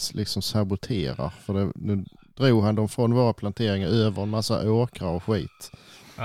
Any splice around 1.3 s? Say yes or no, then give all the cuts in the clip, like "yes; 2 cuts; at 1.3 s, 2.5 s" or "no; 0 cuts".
no; 0 cuts